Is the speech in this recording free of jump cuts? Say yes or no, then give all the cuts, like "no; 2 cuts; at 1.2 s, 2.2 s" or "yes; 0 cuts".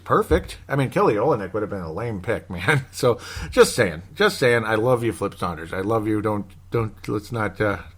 yes; 0 cuts